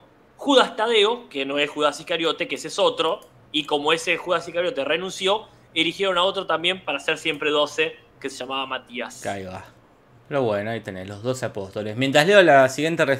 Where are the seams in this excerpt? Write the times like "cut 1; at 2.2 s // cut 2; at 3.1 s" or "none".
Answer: none